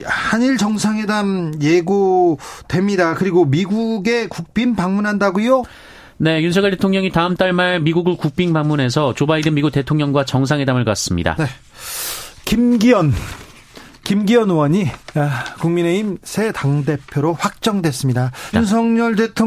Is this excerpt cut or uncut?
cut